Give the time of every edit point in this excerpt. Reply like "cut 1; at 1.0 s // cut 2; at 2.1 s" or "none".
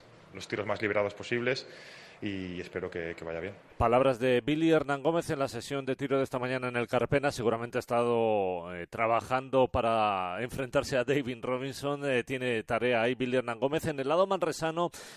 none

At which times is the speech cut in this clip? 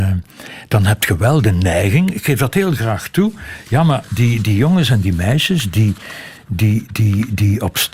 none

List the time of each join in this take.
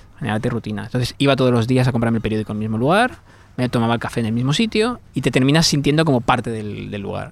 none

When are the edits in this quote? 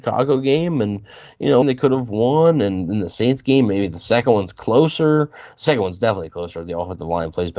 cut 1; at 1.6 s

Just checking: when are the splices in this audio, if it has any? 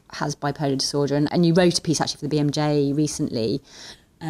cut 1; at 1.3 s

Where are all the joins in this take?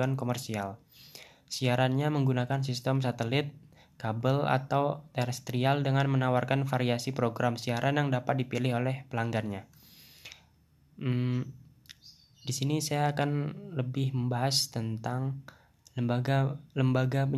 none

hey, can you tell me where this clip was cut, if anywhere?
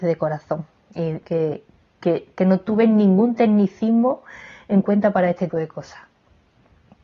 cut 1; at 1.2 s // cut 2; at 5.5 s

